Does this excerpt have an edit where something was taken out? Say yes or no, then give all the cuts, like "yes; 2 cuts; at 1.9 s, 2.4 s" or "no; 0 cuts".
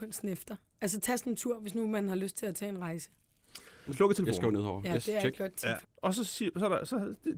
yes; 2 cuts; at 3.9 s, 5.8 s